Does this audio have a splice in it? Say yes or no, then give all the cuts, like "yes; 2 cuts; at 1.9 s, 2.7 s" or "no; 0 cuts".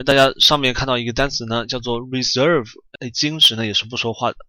yes; 1 cut; at 3.0 s